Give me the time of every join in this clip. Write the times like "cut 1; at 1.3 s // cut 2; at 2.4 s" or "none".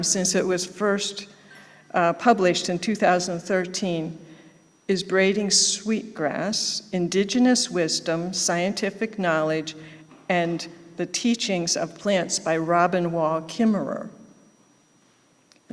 none